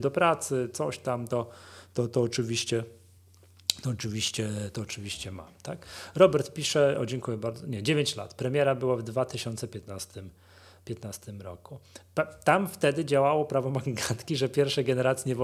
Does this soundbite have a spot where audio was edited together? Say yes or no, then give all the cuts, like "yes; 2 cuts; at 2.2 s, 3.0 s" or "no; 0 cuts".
no; 0 cuts